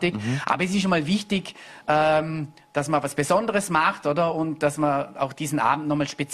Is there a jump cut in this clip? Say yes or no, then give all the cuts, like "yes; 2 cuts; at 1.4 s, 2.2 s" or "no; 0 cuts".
no; 0 cuts